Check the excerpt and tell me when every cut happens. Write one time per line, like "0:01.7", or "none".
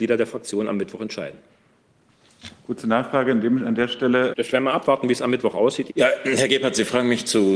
0:04.3
0:05.9